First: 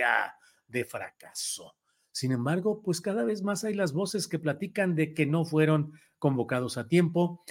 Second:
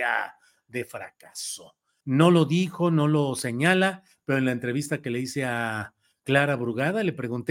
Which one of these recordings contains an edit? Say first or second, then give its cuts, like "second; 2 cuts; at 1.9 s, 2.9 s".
second; 1 cut; at 2.0 s